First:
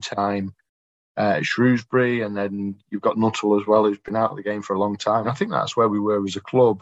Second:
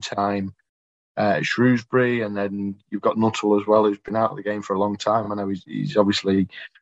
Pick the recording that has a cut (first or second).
first